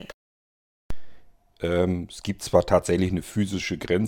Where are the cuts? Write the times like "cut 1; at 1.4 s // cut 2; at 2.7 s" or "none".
cut 1; at 1.5 s